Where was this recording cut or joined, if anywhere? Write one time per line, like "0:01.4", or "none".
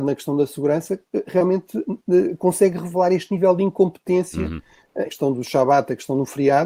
0:05.1